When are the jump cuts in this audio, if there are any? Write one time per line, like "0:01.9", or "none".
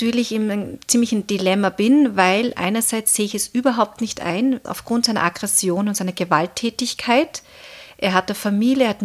0:04.6

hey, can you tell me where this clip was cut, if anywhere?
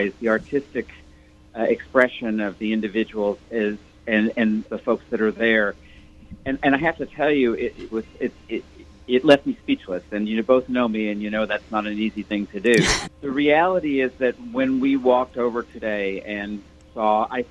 0:04.6
0:07.9
0:13.0

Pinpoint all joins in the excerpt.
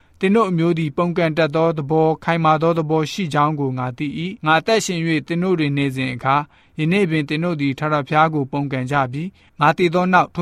0:04.4

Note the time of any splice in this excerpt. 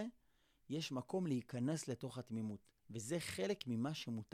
0:02.8

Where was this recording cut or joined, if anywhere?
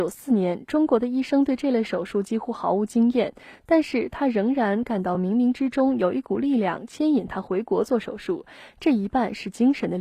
none

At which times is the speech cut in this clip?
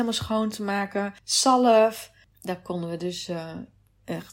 0:02.3

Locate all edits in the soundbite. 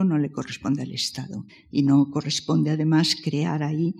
0:01.5

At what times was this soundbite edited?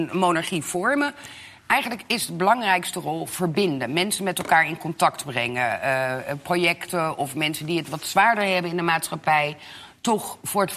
none

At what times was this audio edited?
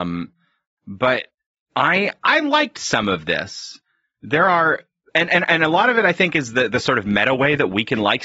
none

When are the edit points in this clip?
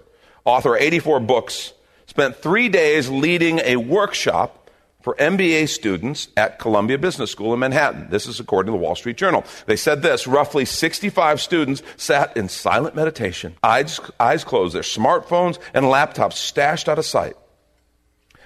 0:13.6

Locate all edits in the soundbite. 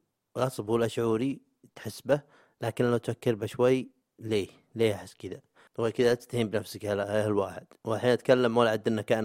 0:05.7

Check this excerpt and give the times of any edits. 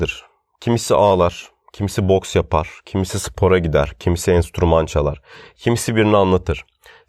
none

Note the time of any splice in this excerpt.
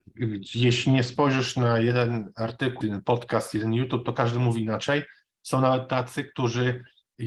0:02.8

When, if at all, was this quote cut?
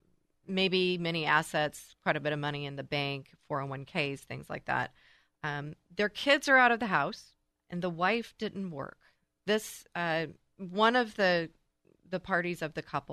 0:07.5

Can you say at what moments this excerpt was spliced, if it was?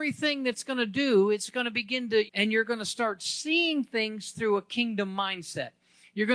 0:02.3

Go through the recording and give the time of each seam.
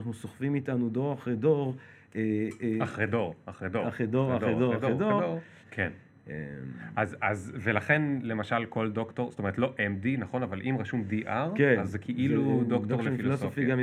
0:05.6

